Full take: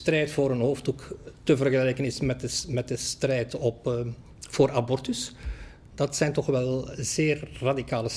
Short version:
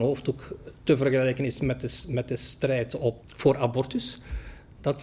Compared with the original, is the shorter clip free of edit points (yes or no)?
no